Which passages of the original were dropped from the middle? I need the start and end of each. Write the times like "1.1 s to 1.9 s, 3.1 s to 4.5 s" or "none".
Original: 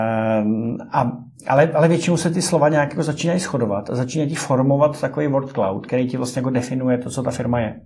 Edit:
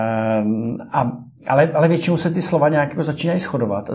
none